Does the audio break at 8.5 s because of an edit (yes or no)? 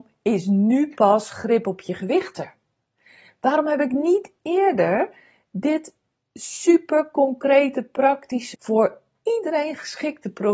yes